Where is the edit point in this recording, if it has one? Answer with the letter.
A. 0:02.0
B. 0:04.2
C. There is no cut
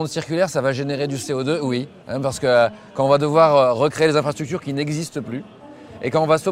A